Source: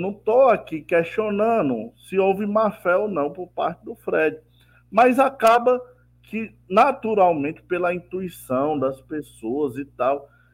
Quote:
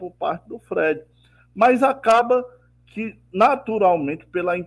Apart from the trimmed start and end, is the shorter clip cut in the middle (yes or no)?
no